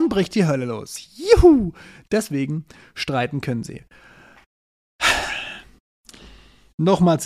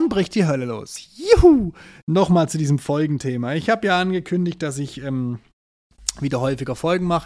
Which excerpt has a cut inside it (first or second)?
second